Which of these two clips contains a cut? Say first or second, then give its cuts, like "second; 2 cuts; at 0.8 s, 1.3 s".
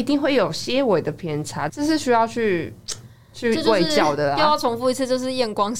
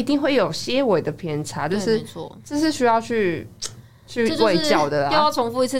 first; 1 cut; at 1.7 s